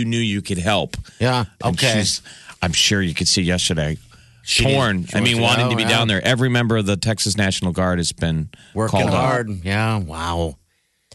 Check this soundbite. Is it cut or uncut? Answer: cut